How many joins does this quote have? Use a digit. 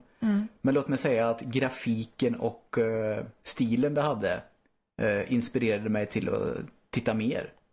0